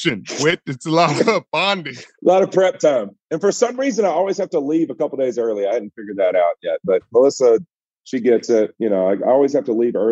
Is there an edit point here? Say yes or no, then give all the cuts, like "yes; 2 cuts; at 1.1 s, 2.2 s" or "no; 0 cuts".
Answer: no; 0 cuts